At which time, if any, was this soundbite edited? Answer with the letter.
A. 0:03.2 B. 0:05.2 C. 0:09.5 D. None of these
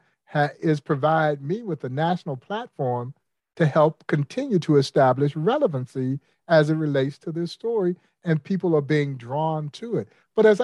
D